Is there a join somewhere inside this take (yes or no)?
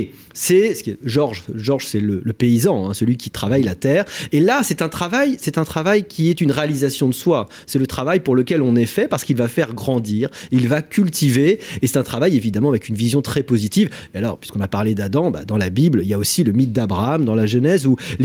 no